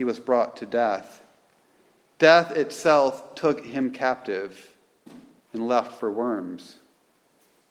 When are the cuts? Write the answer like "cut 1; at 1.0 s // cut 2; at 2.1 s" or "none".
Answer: cut 1; at 5.4 s